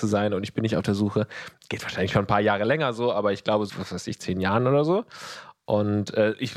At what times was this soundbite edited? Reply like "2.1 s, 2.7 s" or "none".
3.7 s